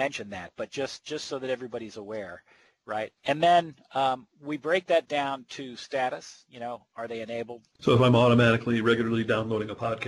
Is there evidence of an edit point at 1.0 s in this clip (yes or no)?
no